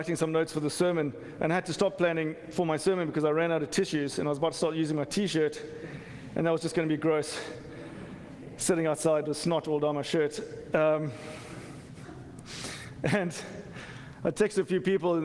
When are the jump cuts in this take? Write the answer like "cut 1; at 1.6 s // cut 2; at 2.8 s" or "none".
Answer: none